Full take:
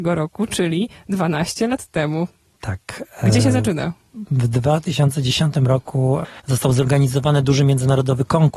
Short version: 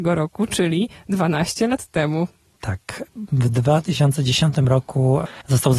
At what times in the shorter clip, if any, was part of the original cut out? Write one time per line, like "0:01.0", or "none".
0:03.1